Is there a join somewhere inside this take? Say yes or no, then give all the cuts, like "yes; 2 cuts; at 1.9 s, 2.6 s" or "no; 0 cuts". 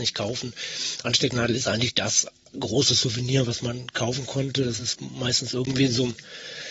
no; 0 cuts